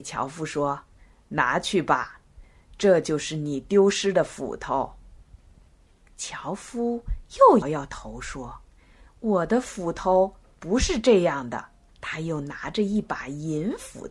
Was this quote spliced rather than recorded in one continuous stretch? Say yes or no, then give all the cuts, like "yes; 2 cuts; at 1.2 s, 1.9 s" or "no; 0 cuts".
yes; 2 cuts; at 7.6 s, 11.9 s